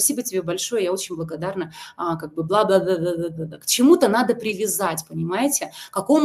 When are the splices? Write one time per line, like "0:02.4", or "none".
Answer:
none